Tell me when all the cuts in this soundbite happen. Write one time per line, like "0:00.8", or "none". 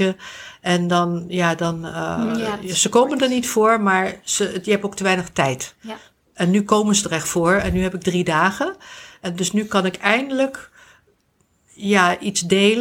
none